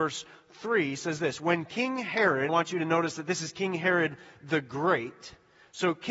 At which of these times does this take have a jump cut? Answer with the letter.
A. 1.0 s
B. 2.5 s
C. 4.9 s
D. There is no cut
B